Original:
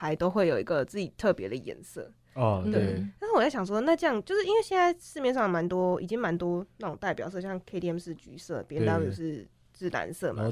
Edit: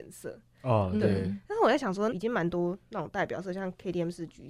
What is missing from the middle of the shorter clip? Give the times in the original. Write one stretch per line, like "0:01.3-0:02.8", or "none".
0:03.8-0:06.0